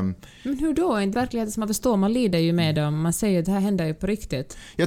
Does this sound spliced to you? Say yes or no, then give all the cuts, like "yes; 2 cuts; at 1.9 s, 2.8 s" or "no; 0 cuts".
yes; 1 cut; at 1.1 s